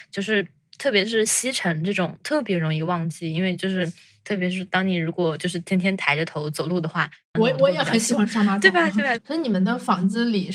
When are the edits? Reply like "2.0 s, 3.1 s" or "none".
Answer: 7.4 s, 9.2 s